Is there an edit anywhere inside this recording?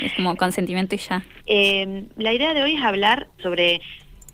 yes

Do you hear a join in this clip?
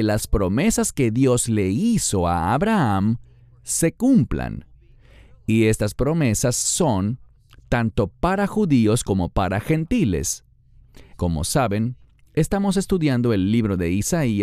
yes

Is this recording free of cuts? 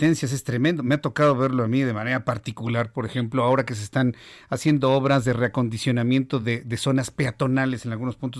yes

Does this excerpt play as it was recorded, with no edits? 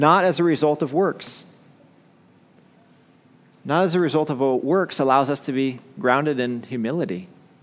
yes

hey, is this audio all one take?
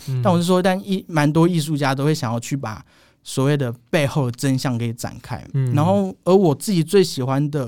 yes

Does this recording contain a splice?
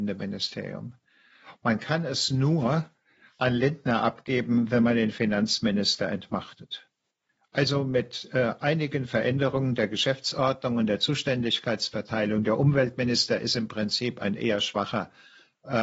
no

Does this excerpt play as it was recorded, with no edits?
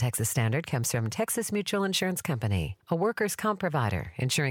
yes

